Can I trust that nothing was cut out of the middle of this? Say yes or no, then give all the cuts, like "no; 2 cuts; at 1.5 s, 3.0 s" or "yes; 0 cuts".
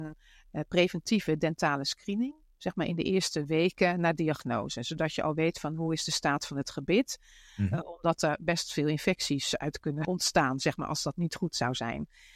yes; 0 cuts